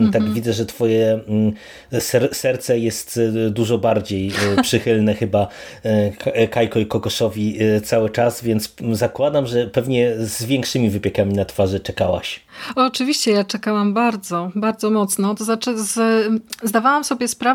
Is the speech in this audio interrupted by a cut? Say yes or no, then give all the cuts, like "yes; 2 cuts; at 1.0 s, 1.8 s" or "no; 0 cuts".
no; 0 cuts